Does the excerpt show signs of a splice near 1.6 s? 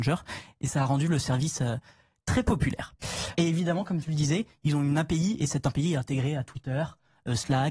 no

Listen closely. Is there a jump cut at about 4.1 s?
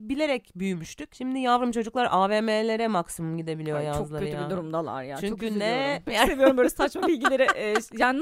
no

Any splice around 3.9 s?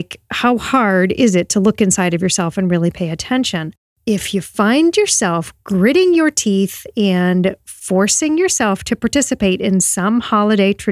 yes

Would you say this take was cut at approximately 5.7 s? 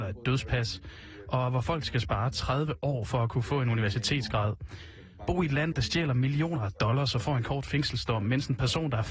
yes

